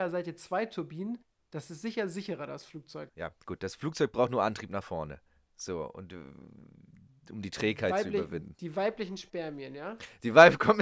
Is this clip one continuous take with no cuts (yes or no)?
no